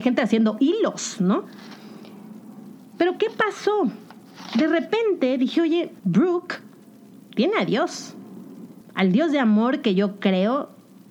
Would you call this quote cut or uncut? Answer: cut